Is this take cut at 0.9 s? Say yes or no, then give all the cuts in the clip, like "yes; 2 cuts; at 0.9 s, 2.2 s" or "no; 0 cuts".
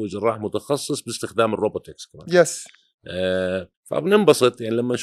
no; 1 cut; at 3.7 s